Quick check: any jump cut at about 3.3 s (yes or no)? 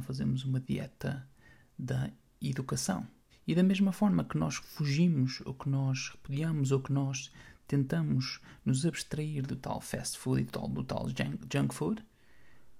yes